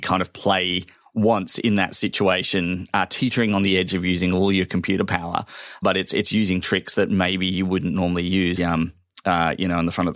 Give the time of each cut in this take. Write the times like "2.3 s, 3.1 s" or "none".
5.8 s, 8.6 s